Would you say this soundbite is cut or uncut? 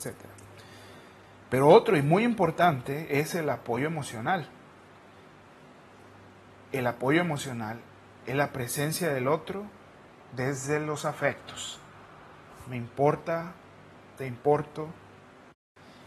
cut